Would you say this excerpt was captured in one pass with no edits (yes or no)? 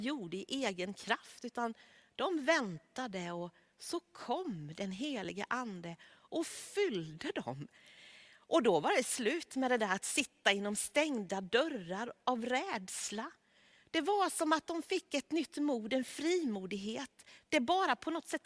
yes